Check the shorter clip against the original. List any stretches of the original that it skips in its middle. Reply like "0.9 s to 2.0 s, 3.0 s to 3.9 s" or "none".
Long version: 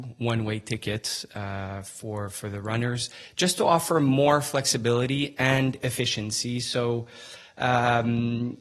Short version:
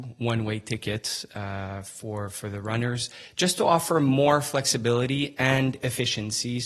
none